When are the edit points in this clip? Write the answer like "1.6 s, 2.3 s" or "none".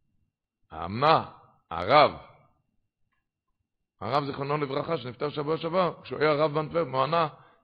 none